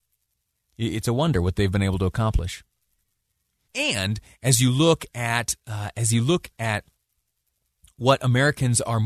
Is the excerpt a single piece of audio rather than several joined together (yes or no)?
no